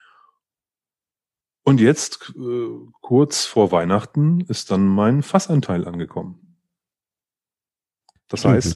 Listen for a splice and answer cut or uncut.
uncut